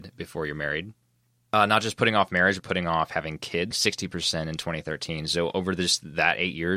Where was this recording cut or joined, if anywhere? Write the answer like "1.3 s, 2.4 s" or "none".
2.6 s, 3.7 s